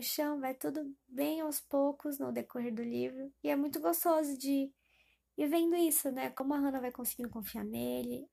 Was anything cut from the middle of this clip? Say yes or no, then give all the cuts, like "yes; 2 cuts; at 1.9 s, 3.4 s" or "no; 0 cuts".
no; 0 cuts